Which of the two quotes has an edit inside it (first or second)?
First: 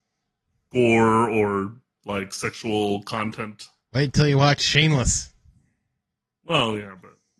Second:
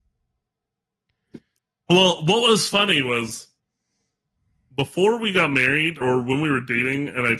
second